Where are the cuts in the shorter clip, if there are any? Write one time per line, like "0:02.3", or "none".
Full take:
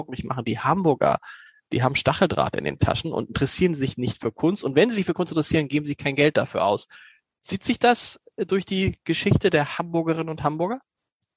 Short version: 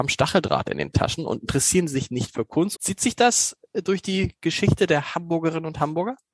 0:02.8